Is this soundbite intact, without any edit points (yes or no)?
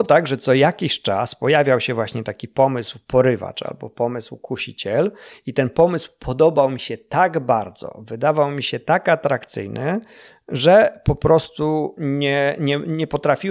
yes